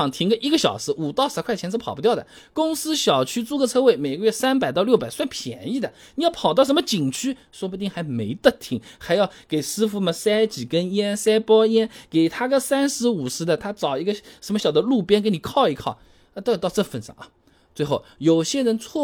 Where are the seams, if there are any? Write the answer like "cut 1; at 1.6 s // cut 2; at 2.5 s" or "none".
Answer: cut 1; at 14.6 s